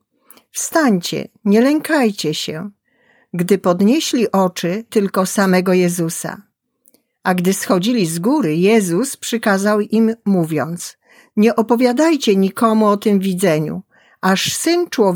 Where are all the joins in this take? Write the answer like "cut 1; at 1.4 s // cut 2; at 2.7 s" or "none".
cut 1; at 4.9 s